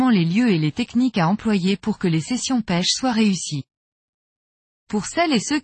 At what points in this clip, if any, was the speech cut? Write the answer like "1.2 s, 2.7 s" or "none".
4.7 s